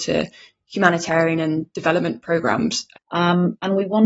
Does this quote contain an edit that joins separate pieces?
yes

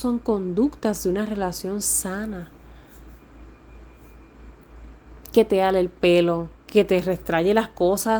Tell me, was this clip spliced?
yes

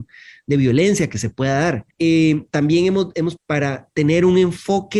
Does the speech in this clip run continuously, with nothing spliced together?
no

